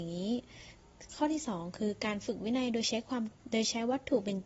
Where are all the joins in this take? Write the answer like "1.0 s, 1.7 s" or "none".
3.4 s